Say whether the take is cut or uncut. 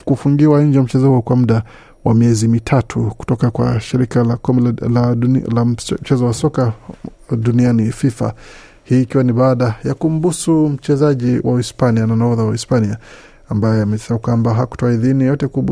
uncut